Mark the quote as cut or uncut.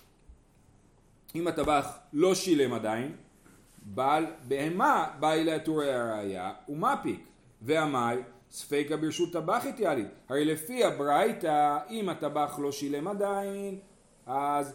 uncut